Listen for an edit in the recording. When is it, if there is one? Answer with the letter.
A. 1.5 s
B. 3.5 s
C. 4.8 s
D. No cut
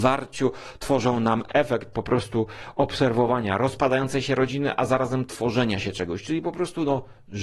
A